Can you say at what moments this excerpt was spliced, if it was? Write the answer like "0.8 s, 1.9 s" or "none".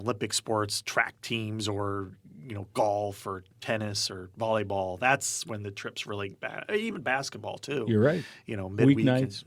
none